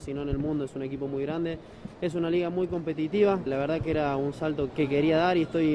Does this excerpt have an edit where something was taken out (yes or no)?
yes